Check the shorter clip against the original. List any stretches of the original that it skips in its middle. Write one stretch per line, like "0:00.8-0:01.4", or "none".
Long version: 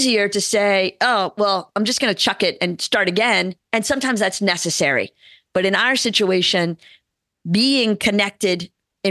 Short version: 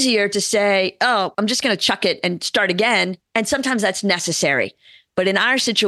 0:01.3-0:01.7